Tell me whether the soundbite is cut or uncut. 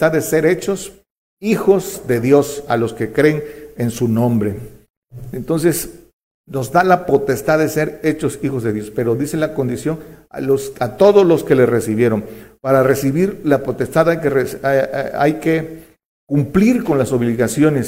uncut